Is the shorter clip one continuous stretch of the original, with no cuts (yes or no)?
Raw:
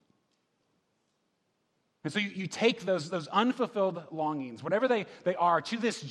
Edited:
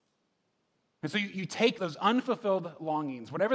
no